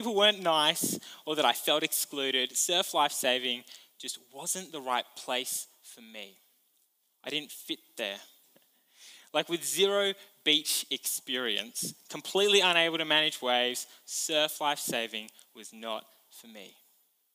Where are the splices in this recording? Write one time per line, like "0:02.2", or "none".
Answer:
0:08.4